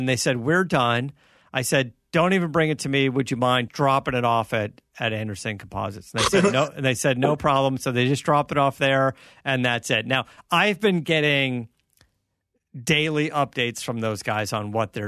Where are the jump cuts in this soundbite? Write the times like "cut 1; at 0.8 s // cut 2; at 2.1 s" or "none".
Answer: cut 1; at 3.7 s